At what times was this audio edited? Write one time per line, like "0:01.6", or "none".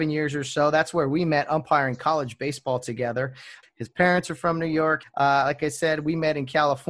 0:03.6
0:05.0